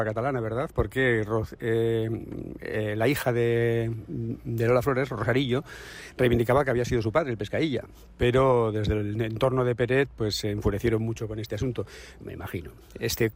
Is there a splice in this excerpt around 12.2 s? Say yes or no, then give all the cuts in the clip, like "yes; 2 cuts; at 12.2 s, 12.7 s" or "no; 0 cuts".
yes; 1 cut; at 12.2 s